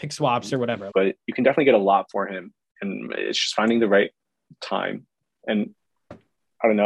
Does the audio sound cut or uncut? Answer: cut